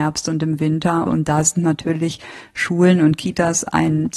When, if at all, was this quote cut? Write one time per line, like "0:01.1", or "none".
0:01.1